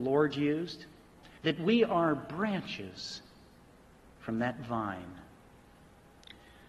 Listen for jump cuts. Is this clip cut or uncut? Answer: cut